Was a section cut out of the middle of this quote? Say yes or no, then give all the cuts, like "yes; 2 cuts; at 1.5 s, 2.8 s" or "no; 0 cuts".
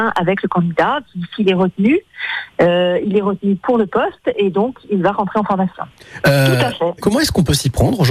yes; 1 cut; at 6.2 s